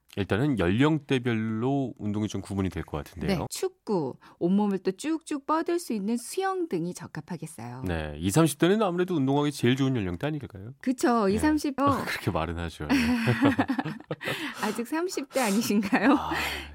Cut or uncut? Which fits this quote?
cut